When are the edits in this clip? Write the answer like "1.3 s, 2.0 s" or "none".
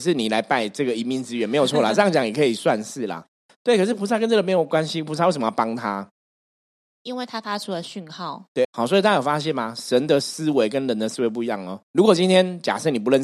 8.6 s, 11.8 s